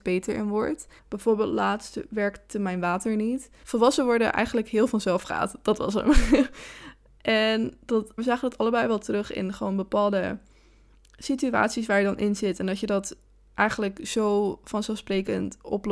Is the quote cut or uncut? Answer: cut